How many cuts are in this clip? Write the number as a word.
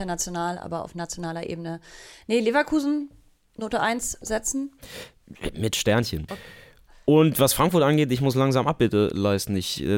one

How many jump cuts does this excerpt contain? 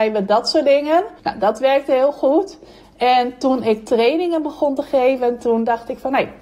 one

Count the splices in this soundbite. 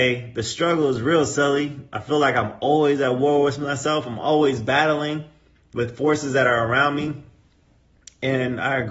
zero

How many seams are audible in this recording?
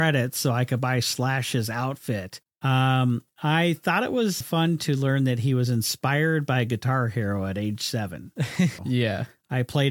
three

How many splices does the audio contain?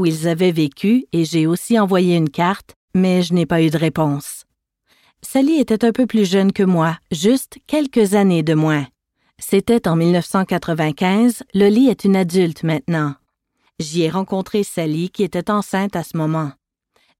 two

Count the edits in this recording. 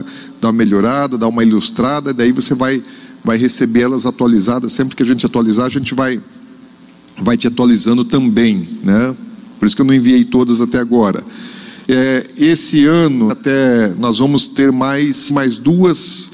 three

